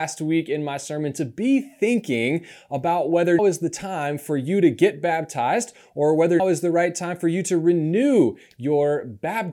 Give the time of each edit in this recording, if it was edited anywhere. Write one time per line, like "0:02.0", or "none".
0:03.4
0:06.4